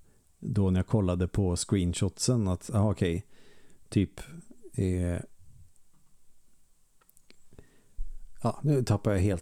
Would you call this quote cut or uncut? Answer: uncut